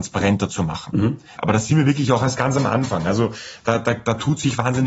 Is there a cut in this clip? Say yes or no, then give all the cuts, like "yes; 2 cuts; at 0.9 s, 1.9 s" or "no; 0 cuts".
yes; 1 cut; at 1.3 s